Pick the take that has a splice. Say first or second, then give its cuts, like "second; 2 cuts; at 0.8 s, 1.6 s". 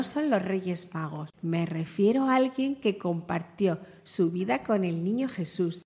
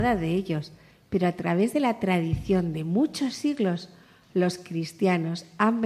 first; 1 cut; at 1.3 s